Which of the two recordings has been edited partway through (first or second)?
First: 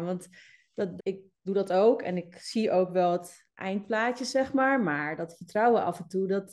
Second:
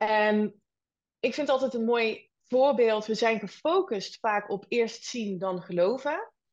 first